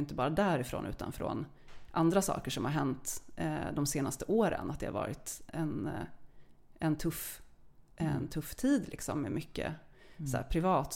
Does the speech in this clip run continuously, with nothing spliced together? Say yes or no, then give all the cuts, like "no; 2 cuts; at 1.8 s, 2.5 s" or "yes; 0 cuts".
no; 1 cut; at 5.5 s